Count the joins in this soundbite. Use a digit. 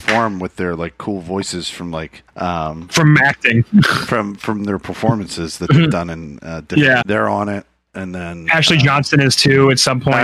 2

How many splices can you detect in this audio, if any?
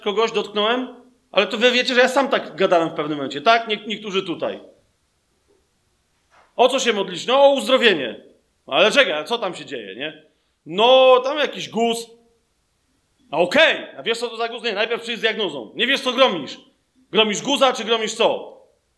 0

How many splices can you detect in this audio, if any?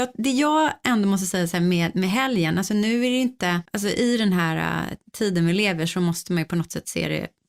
1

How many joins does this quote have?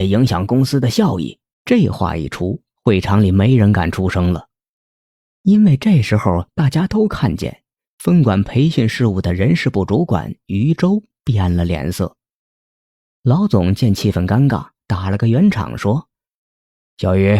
1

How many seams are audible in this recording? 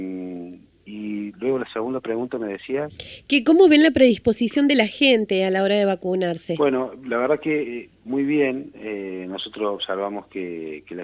0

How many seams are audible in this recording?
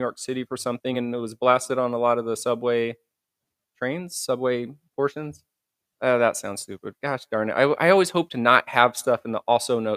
0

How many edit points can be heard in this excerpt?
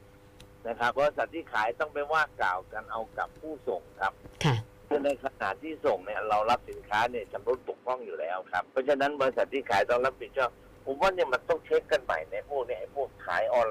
2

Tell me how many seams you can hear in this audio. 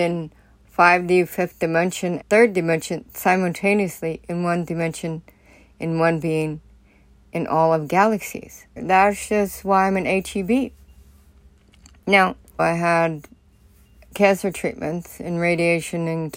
3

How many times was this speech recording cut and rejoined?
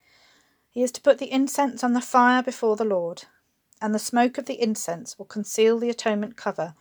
0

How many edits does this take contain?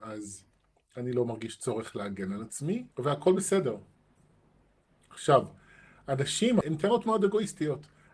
2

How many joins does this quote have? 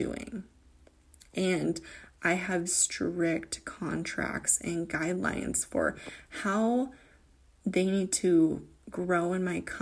1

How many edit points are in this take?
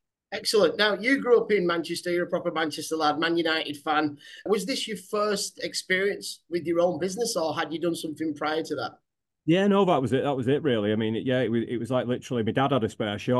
1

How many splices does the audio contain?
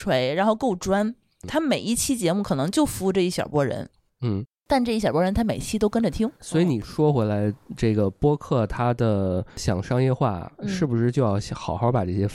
1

